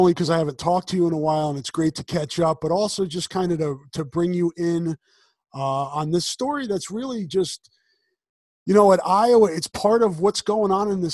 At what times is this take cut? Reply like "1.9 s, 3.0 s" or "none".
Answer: none